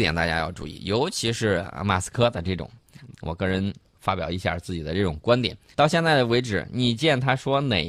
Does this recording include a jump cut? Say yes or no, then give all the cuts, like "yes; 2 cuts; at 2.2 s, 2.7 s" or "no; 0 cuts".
yes; 2 cuts; at 3.1 s, 5.7 s